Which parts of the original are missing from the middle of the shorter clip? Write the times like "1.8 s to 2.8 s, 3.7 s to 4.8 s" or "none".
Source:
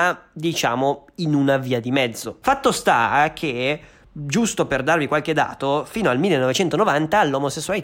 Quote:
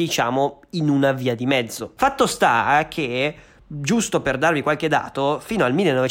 none